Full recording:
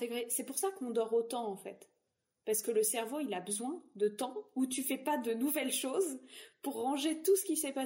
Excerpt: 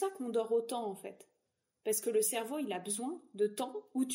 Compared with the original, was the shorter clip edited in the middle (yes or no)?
no